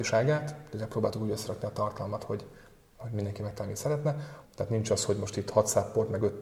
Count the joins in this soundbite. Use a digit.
1